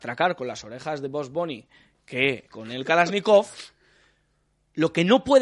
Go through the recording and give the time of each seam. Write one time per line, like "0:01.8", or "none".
0:02.5